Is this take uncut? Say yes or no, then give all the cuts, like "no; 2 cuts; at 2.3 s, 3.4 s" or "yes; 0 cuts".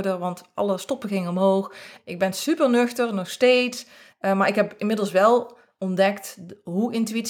no; 2 cuts; at 2.0 s, 4.1 s